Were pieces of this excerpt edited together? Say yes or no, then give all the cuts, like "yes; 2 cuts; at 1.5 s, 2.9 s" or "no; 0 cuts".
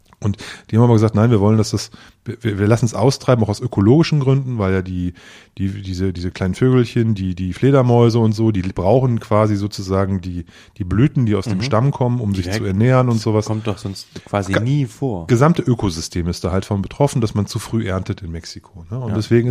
no; 0 cuts